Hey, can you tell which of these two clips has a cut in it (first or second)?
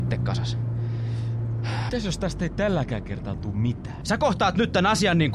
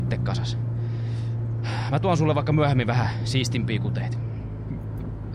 first